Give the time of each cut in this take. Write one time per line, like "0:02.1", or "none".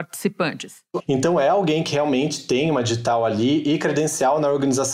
0:01.0